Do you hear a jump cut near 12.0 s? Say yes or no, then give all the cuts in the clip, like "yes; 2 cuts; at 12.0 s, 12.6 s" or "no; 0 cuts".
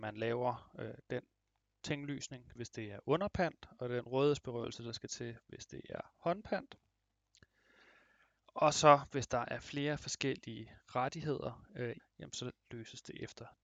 yes; 2 cuts; at 2.6 s, 12.0 s